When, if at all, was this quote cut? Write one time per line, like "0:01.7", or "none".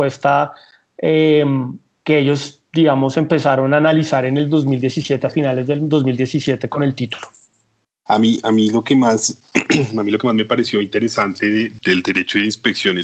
0:08.1
0:11.8